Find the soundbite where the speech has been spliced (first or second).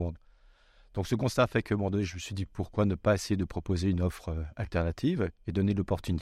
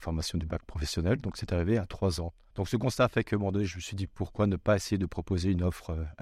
second